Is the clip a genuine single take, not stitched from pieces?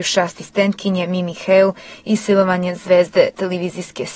yes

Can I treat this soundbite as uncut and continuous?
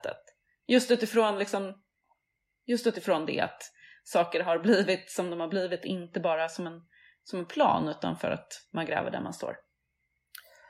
yes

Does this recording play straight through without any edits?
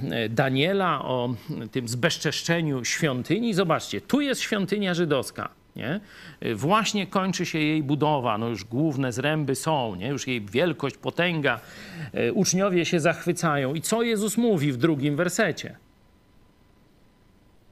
yes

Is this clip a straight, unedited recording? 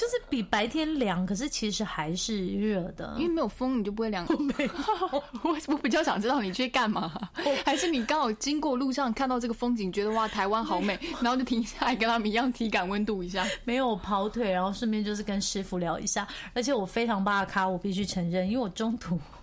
no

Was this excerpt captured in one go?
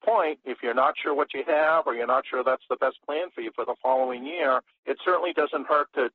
yes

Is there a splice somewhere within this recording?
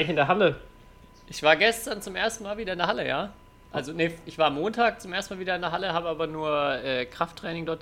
yes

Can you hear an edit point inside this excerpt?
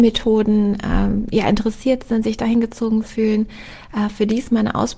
no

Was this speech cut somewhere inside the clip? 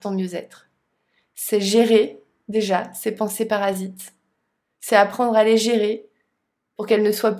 no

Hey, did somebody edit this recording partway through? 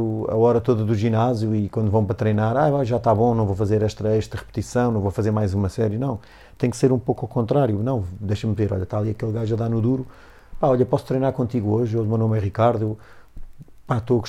no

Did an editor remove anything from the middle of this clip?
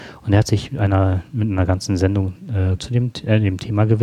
yes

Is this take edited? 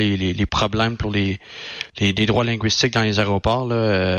no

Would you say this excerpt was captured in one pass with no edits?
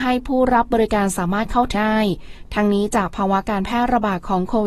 no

